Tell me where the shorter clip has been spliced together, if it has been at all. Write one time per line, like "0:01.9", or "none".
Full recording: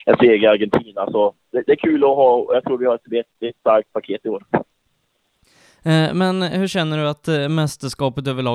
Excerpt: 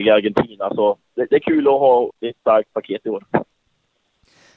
0:02.1

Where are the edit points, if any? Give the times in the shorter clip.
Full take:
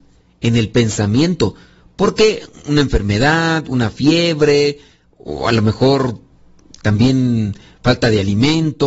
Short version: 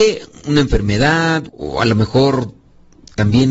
0:01.5

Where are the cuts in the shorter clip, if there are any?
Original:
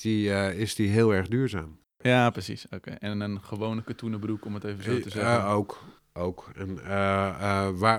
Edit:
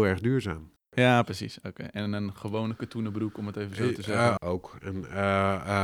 0:04.4

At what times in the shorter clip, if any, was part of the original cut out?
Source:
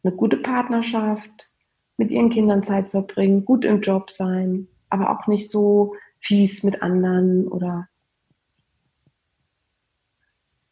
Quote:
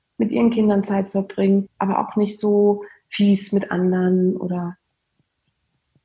0:01.7

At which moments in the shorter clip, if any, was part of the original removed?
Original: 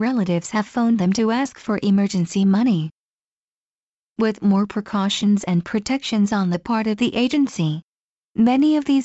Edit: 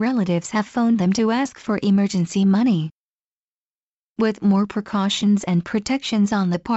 none

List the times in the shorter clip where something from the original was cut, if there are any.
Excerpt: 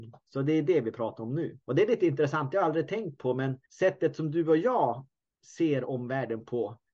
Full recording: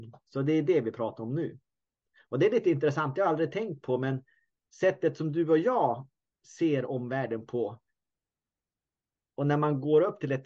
0:01.6
0:03.6

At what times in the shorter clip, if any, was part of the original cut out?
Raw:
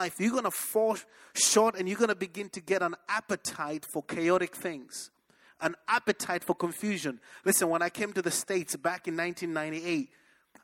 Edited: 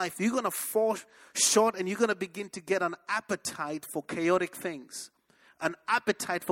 none

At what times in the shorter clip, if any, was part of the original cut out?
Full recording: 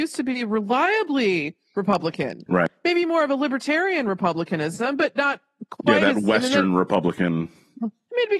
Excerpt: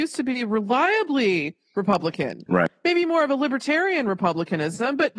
none

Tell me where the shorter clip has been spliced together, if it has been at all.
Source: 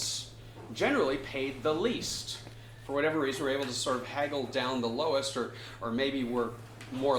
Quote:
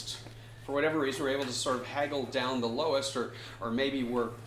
none

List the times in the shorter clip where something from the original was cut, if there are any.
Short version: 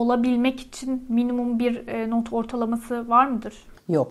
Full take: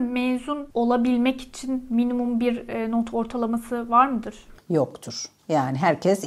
none

